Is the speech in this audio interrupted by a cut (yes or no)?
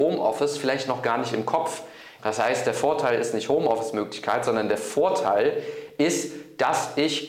yes